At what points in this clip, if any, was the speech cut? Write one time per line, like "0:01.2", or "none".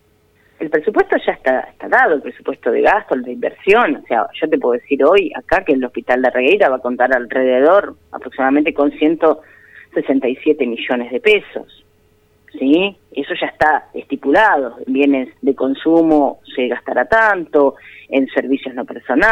0:13.0
0:15.4